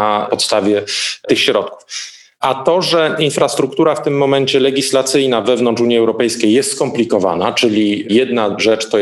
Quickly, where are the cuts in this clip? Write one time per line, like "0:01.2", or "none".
none

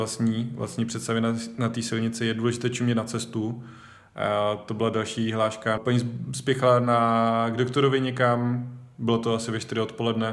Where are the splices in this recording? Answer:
0:05.8

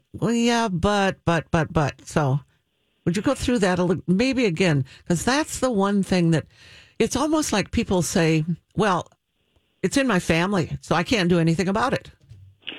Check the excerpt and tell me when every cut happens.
none

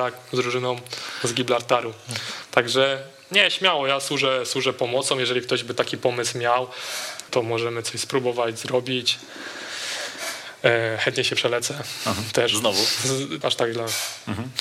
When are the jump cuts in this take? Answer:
0:07.3
0:13.4

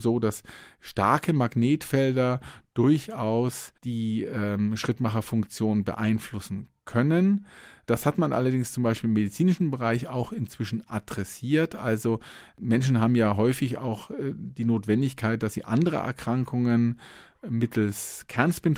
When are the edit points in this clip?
0:03.8

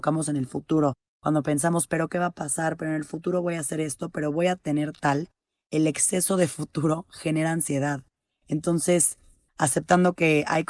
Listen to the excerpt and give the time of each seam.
0:09.5

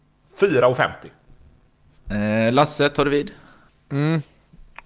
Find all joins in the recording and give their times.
0:02.0

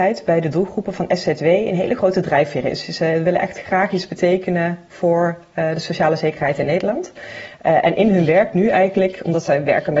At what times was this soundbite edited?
none

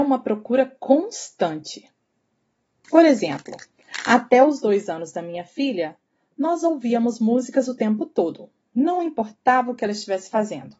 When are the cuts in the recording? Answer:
0:02.8

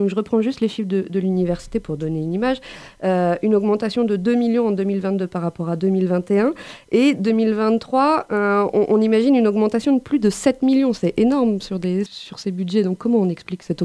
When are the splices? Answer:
0:12.1

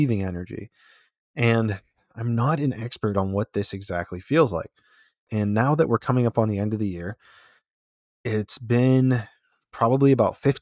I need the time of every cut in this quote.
0:05.3

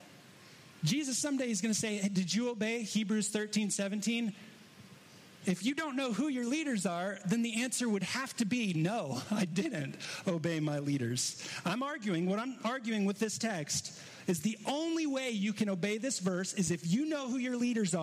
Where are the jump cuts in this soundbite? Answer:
none

